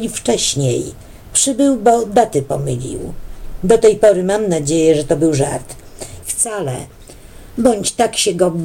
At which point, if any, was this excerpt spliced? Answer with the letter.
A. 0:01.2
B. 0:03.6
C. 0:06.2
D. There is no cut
C